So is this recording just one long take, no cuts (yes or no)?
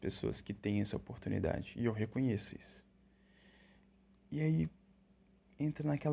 yes